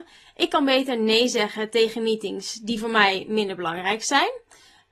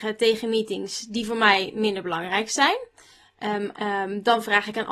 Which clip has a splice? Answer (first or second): second